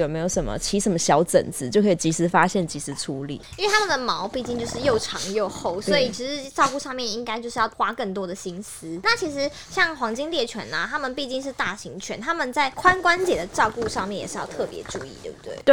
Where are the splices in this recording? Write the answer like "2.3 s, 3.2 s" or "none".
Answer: none

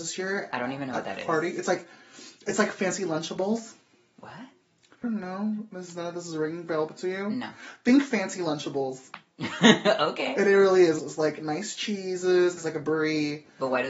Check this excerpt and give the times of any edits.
5.0 s, 11.0 s, 12.6 s

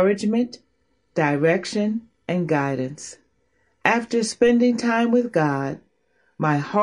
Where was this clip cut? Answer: none

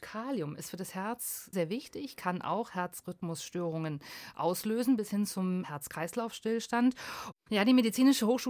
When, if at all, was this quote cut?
1.5 s, 7.3 s

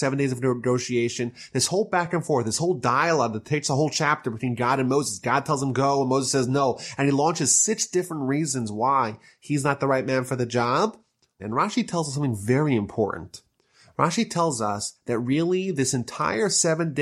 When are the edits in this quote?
11.4 s

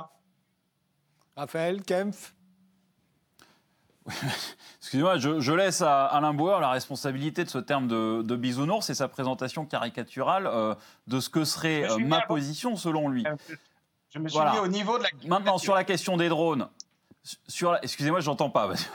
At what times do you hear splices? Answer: none

